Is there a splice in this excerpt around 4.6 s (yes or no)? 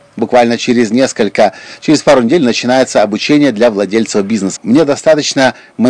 yes